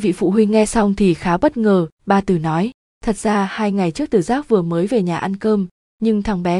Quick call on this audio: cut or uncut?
uncut